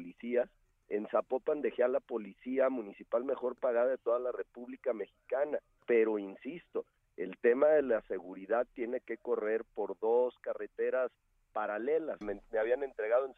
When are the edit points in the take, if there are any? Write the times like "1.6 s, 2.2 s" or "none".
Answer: 5.8 s, 12.2 s

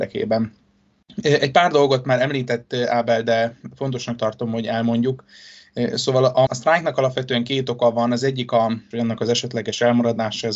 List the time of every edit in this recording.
6.5 s, 8.9 s

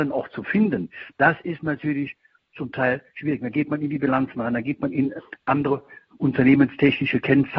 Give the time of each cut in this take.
none

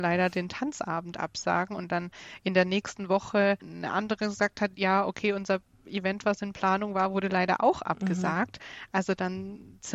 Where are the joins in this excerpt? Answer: none

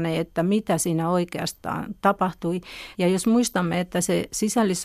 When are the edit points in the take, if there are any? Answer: 2.9 s

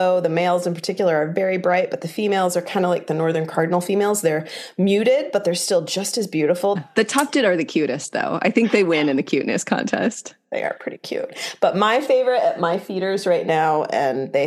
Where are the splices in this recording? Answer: 6.8 s

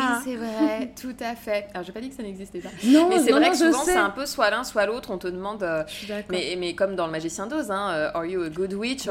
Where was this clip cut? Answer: none

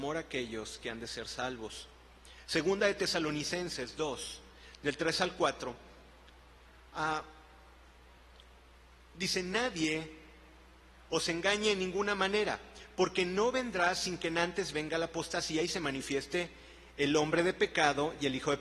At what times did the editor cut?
none

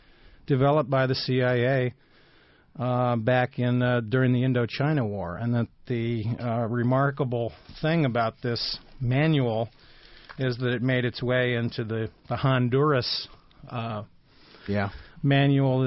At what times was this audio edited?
none

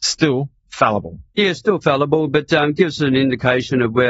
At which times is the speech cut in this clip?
none

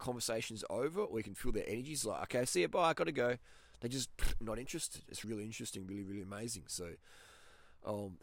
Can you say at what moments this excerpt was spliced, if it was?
5.2 s

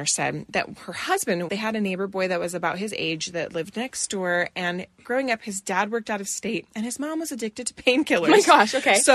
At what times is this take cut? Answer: 1.5 s

